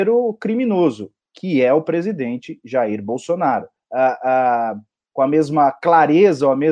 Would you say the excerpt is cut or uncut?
cut